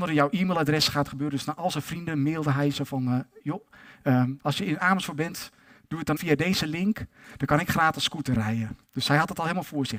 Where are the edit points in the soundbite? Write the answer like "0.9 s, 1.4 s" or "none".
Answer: 4.4 s, 6.2 s